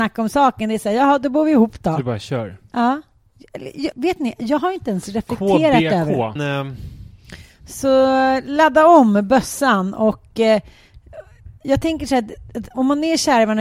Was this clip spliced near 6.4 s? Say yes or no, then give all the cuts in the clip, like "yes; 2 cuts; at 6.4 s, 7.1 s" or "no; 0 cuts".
yes; 2 cuts; at 3.9 s, 6.4 s